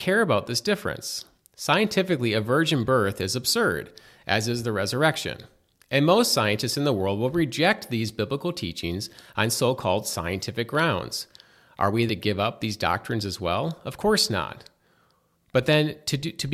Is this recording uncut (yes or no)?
no